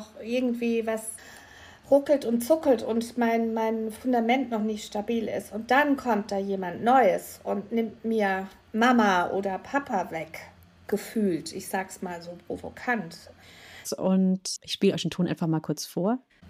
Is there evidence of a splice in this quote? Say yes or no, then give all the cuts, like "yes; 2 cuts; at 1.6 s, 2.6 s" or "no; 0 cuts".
yes; 1 cut; at 13.8 s